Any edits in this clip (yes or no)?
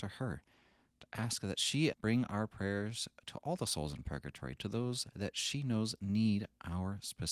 yes